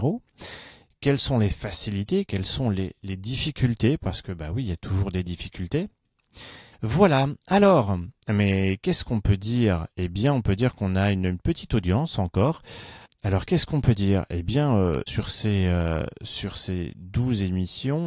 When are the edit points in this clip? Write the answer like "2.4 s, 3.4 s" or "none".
6.7 s